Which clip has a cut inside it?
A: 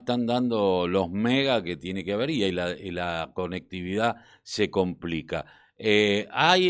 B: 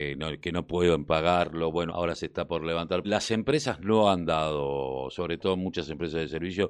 B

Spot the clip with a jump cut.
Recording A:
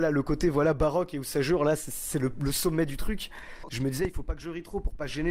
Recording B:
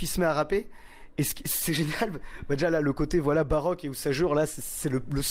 A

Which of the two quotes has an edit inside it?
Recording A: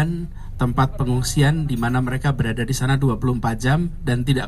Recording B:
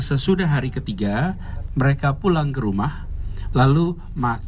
B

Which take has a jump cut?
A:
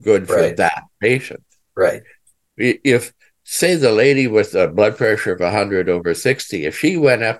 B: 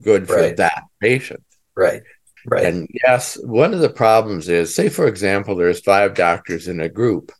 B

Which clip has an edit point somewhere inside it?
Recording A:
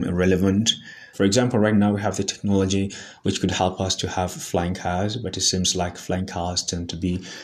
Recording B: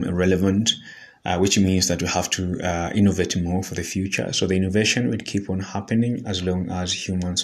A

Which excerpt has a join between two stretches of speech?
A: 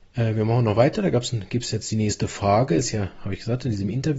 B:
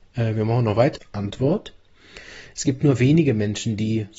B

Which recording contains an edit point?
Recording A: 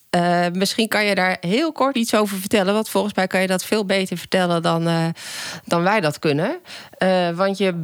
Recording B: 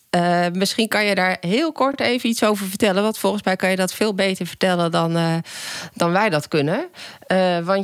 A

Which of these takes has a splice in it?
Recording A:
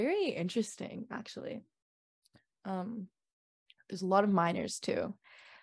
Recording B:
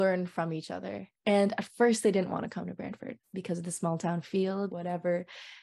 B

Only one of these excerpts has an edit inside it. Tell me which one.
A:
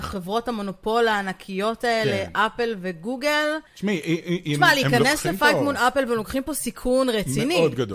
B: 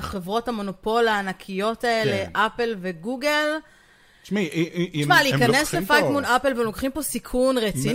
A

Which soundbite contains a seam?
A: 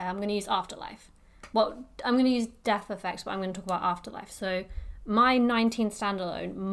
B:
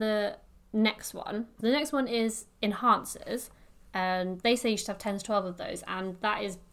B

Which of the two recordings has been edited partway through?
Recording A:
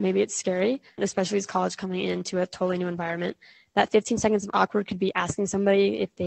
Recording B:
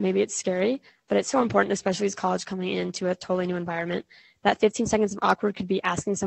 A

